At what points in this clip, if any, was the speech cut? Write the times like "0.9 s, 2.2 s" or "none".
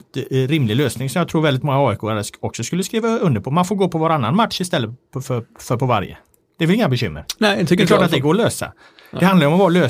none